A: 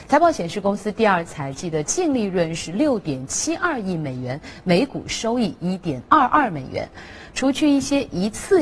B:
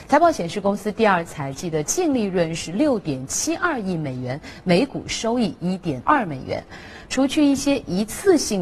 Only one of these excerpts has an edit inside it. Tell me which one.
B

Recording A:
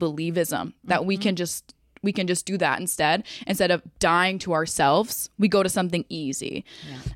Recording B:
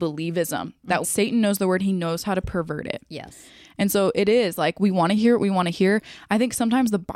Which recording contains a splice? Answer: B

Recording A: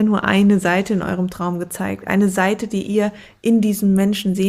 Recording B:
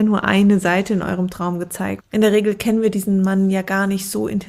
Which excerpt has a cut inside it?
B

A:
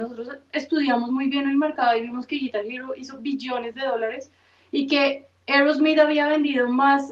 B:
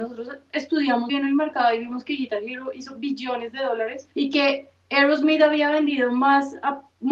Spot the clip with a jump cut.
B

